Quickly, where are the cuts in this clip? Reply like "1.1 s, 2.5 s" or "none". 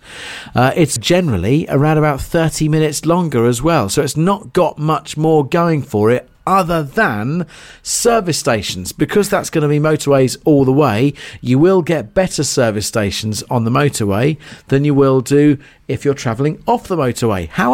1.0 s